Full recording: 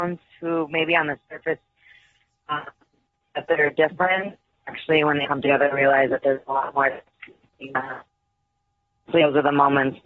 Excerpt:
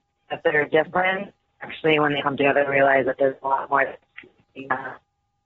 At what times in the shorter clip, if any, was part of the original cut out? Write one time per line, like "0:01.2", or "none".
none